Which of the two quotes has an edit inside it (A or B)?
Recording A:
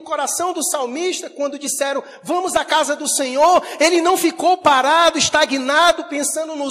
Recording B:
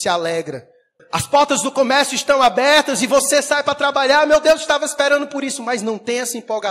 B